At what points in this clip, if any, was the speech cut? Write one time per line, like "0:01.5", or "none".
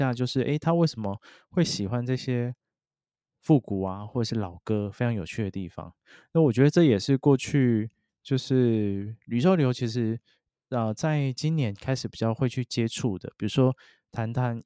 none